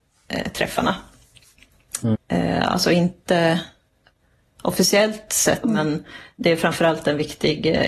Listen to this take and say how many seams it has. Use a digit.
2